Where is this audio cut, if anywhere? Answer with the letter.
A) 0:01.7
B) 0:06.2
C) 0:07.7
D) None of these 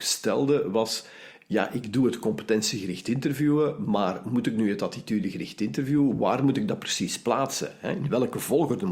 D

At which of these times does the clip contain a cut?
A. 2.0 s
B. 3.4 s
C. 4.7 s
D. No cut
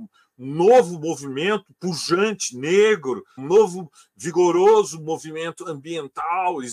B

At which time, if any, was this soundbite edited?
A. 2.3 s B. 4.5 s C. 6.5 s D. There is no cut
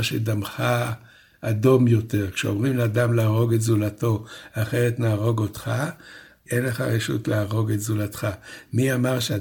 C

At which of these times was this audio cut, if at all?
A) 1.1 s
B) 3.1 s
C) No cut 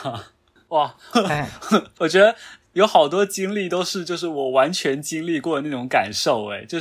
A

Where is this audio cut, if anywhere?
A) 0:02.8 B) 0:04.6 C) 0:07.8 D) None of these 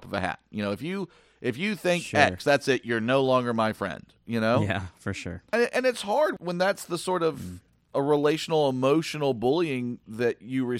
D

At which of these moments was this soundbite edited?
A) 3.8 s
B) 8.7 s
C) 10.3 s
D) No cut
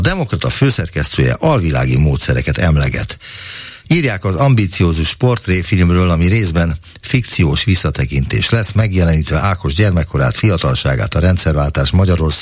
A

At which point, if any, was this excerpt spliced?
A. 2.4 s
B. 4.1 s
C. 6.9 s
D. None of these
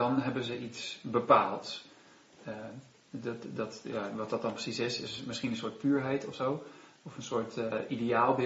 D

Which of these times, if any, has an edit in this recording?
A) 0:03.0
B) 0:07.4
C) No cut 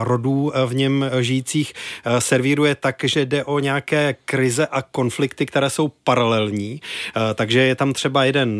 C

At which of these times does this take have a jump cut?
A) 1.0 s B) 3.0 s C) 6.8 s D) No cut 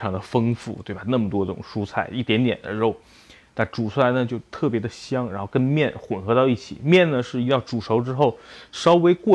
D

